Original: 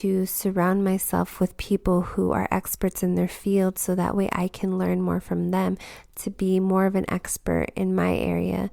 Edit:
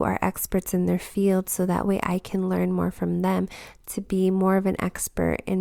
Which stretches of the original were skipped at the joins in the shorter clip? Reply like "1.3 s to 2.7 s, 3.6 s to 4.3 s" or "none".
none